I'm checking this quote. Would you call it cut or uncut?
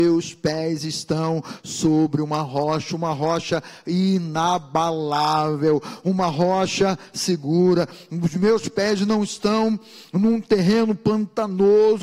uncut